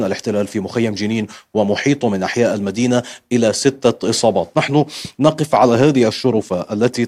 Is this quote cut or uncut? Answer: uncut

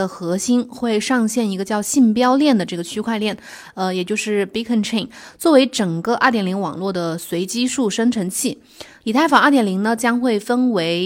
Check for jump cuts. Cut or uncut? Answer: cut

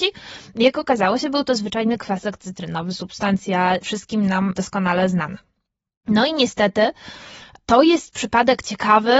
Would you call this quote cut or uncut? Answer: uncut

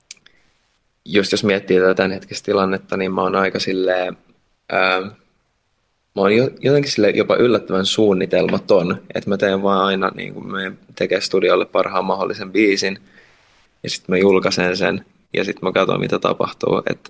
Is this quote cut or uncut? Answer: uncut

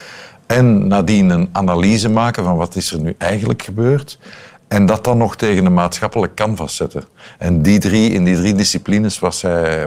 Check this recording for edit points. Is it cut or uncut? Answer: uncut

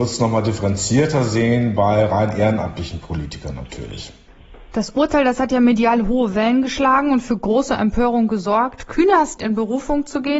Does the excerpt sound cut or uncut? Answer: cut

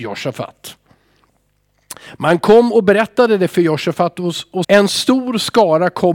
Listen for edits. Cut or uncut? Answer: cut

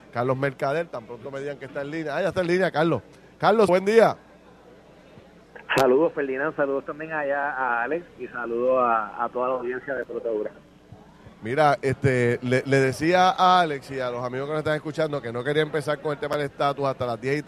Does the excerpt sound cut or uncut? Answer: cut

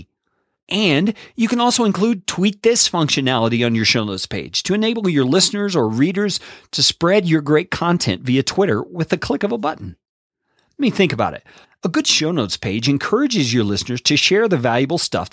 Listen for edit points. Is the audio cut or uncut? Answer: cut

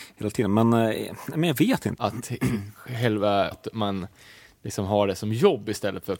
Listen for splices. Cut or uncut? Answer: cut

